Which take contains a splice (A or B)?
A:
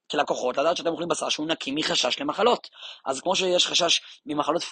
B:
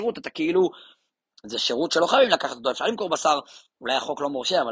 B